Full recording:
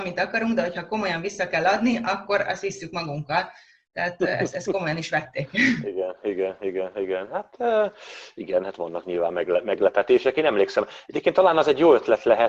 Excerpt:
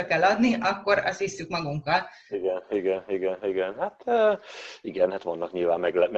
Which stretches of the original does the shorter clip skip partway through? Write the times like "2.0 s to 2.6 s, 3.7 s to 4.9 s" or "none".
3.7 s to 5.8 s